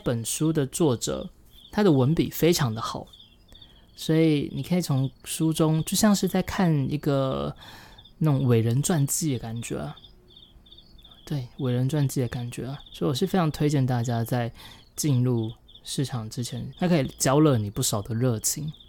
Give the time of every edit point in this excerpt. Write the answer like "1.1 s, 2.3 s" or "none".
12.9 s, 16.7 s